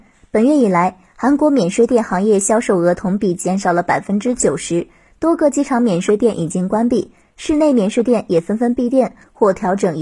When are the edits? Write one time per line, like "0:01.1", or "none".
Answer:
none